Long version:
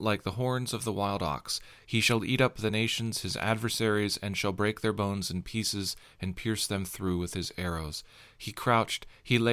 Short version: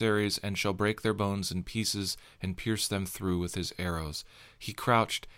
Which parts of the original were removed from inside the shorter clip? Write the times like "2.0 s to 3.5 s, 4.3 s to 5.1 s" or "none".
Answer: none